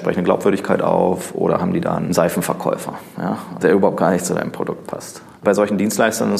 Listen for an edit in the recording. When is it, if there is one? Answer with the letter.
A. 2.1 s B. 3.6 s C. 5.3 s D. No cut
B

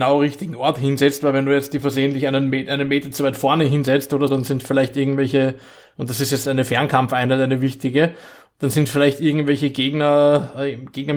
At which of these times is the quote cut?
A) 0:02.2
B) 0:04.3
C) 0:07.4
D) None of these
B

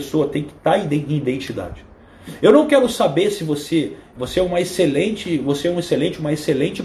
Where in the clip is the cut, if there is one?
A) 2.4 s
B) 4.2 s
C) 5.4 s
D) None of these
B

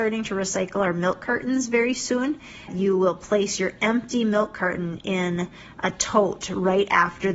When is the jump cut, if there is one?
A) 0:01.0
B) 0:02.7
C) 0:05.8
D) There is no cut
B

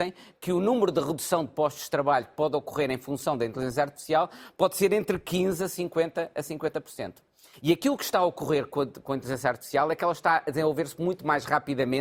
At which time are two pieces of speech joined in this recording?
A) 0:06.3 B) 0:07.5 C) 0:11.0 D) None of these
B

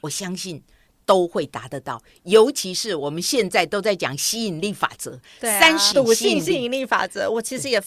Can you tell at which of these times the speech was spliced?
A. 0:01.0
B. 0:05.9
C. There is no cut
B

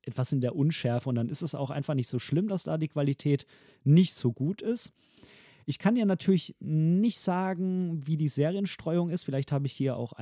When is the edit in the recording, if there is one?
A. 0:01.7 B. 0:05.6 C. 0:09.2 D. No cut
D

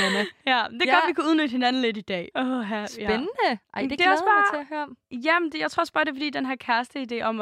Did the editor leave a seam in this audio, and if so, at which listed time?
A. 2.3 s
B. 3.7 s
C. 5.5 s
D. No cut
A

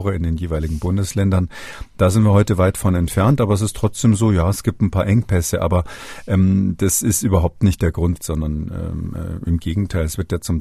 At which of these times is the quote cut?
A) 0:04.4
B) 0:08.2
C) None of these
B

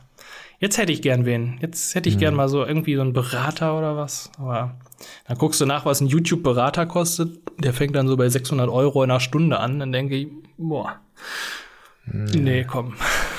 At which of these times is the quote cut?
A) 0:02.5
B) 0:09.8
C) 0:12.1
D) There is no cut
D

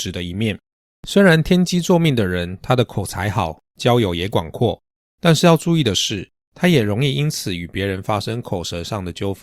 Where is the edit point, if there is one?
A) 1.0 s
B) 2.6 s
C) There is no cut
A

